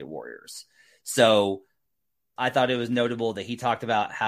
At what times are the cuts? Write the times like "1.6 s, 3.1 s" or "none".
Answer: 2.4 s